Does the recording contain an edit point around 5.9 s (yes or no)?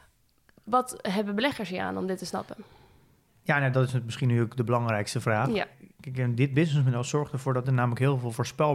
no